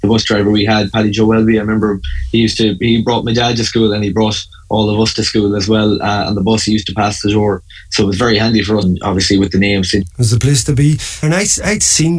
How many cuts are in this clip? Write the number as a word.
three